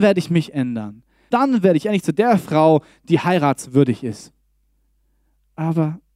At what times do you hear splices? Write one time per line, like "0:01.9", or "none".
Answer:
0:01.3